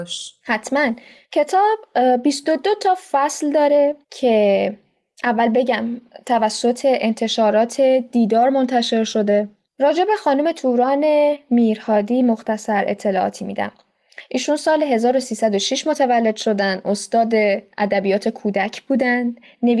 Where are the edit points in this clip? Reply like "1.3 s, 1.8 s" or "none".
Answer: 4.0 s